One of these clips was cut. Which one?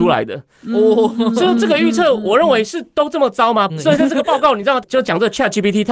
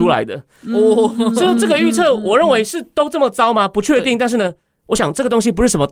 first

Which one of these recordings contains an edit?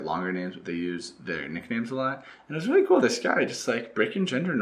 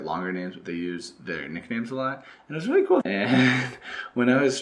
second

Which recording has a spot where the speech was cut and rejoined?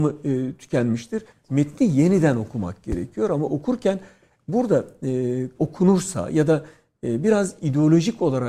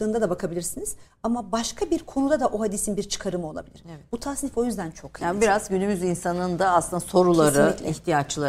first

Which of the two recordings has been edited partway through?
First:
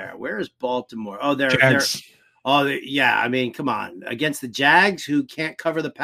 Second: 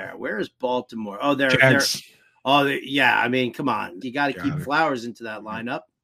second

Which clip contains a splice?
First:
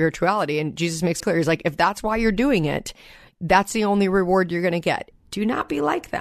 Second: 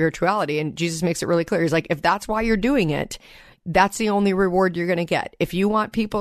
first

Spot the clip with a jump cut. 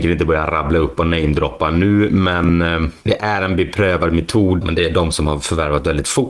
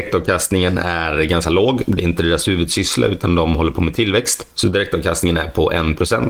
first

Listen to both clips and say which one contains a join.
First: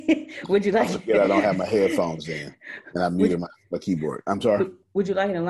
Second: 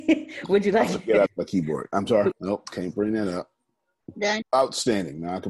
second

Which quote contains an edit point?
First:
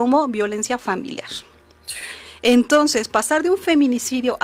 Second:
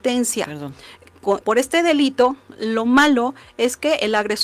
second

